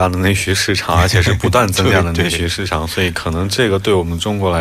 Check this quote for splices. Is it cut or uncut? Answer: uncut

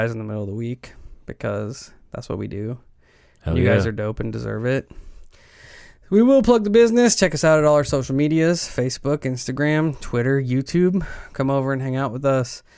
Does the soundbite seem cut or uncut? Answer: uncut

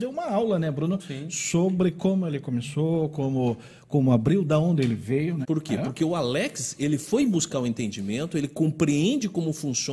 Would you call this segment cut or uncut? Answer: cut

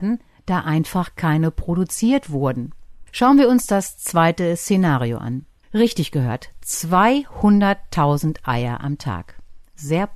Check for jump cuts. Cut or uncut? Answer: cut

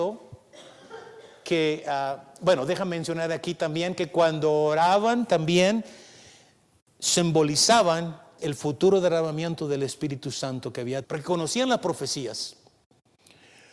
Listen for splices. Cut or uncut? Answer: cut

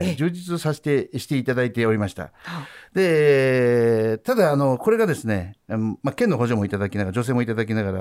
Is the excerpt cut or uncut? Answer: uncut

